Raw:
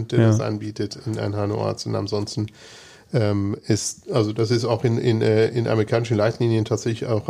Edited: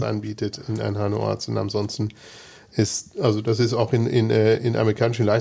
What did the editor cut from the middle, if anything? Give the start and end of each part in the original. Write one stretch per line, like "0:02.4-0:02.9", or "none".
0:03.1-0:03.6